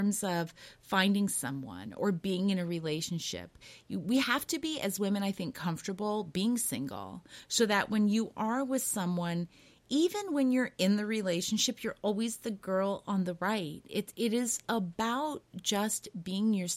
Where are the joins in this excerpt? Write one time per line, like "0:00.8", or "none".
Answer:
none